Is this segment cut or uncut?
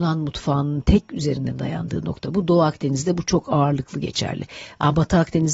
uncut